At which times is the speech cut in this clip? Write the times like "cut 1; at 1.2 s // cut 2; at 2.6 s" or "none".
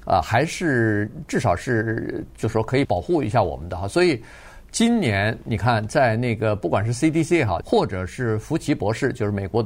cut 1; at 2.8 s // cut 2; at 7.6 s